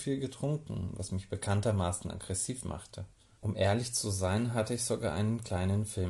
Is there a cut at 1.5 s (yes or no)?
no